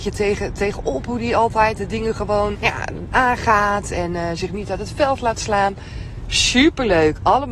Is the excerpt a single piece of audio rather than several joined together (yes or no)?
no